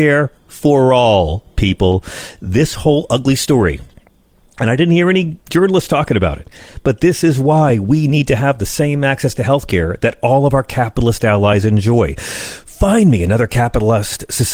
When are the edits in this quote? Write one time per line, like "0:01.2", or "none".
none

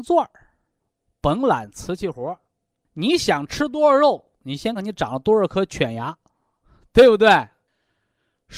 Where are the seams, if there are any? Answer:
0:04.8

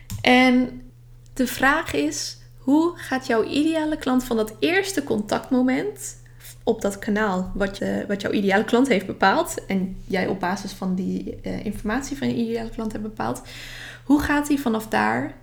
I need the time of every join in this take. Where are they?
0:07.8

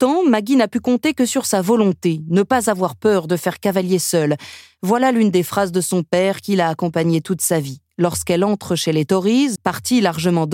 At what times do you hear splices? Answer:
0:09.6

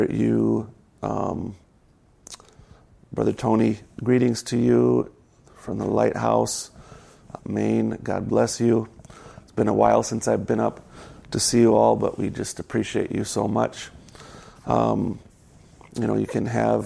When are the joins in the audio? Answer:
0:07.4
0:14.6

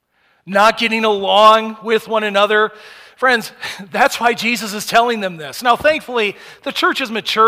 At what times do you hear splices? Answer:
none

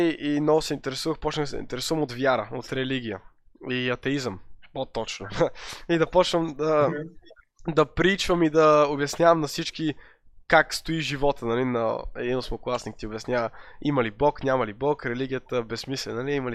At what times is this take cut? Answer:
none

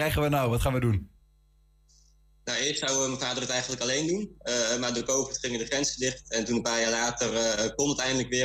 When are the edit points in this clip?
none

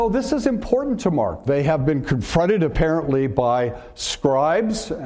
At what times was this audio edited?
0:01.5

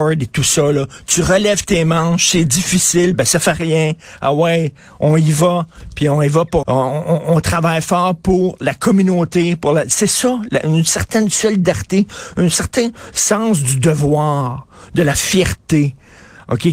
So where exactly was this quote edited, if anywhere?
0:06.6

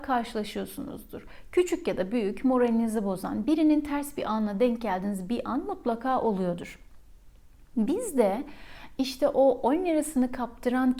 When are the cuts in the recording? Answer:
0:03.4

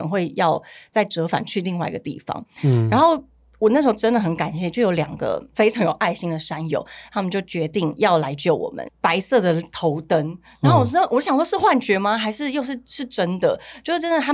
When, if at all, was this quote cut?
0:08.9

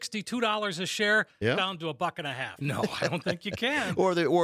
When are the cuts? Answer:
0:02.6

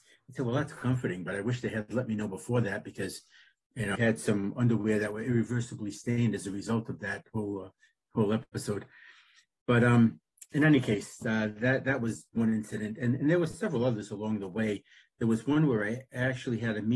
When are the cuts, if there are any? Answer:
0:04.0

